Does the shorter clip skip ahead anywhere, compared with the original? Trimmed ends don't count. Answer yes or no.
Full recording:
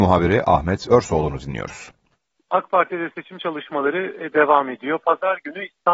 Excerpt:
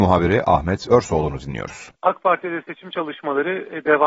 yes